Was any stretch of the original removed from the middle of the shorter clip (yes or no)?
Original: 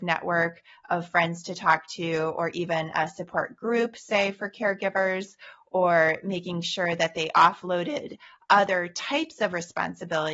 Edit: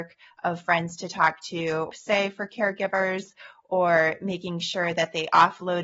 yes